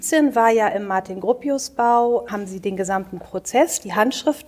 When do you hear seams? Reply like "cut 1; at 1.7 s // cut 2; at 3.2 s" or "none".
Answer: cut 1; at 2.3 s